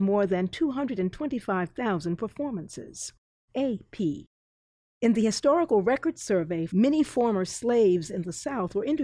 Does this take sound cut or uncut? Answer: cut